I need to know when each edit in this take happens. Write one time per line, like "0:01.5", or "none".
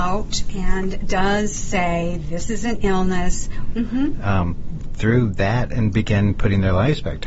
0:03.7